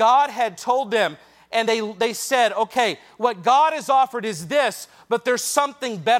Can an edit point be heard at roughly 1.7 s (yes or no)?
no